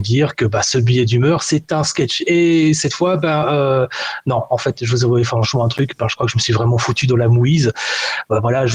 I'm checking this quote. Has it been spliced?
no; 0 cuts

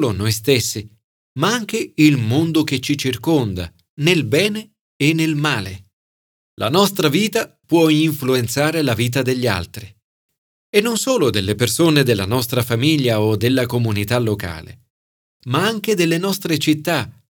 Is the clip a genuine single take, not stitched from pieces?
no; 1 cut; at 6.4 s

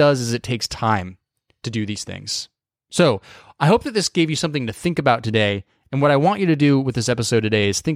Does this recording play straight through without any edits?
yes; 0 cuts

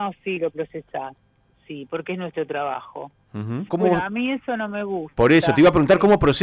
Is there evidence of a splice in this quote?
yes; 1 cut; at 3.7 s

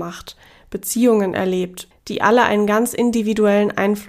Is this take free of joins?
no; 1 cut; at 1.9 s

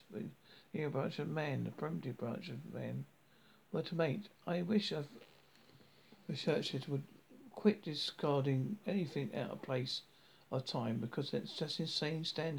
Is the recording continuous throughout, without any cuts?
yes; 0 cuts

